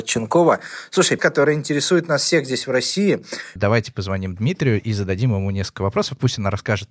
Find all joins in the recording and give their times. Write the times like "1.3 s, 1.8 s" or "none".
1.2 s, 3.6 s